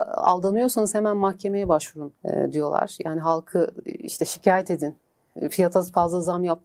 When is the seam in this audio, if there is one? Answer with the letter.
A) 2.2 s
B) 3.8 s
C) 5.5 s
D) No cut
A